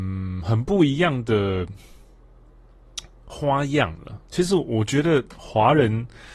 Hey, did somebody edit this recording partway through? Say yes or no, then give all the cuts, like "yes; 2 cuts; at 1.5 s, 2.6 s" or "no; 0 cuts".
no; 0 cuts